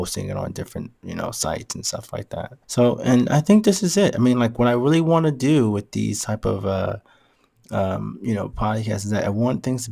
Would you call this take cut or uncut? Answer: cut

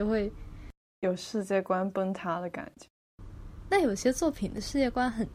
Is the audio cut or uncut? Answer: uncut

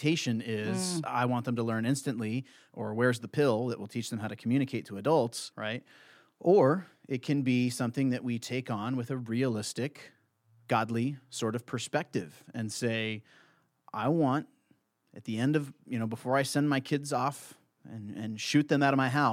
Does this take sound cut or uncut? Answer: cut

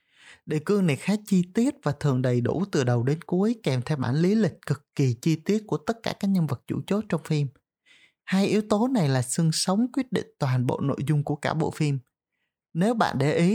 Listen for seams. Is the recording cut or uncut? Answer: uncut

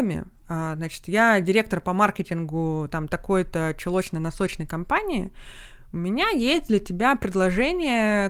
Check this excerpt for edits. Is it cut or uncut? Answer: cut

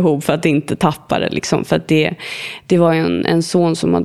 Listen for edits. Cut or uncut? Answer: uncut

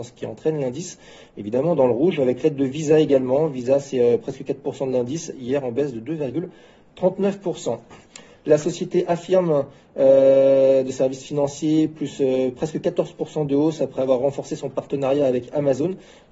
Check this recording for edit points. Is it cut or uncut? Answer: uncut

